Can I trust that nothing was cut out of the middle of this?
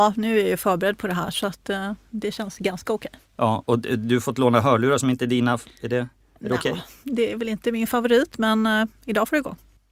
yes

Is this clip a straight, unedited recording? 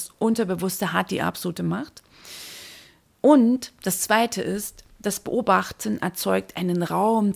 yes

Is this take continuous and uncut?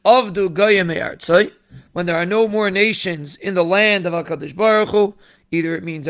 yes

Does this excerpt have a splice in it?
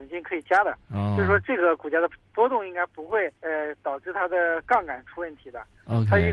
yes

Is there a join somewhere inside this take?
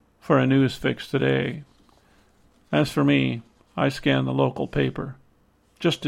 no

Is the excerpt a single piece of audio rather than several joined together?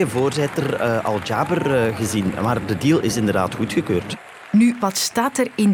yes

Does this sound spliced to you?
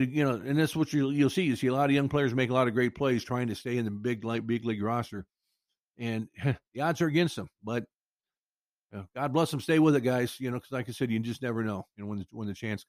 no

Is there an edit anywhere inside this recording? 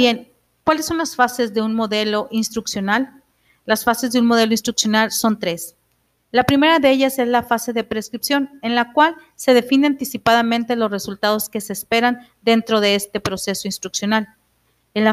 no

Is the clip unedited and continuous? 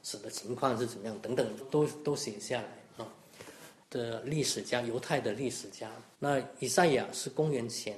no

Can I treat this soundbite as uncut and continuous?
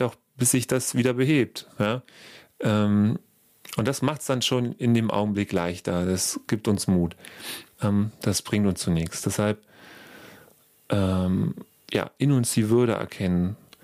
no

